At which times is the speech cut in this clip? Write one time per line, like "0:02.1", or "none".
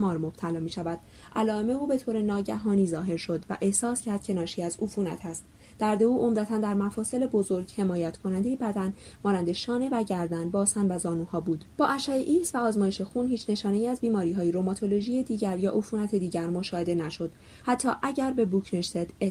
0:11.7
0:17.6